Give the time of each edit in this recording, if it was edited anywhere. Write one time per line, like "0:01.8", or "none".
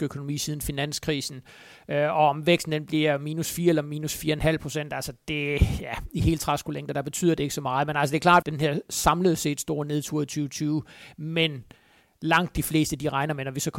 0:08.4